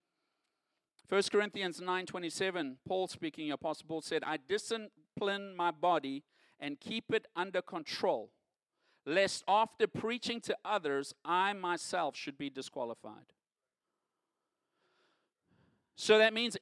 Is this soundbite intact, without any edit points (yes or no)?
yes